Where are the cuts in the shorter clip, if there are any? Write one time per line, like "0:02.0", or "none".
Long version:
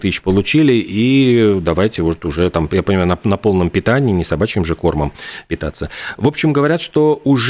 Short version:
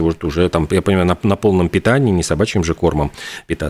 none